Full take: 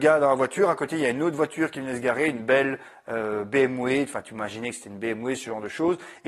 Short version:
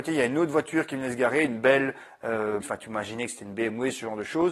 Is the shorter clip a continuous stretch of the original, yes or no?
no